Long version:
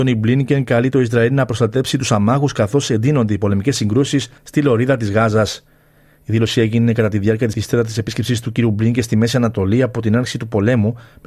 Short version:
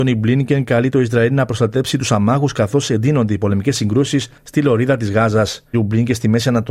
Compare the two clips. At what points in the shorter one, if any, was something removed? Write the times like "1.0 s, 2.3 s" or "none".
5.7 s